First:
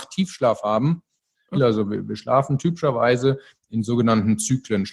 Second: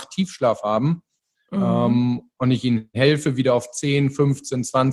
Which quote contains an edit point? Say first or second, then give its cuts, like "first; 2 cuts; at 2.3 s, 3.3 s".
first; 1 cut; at 1.5 s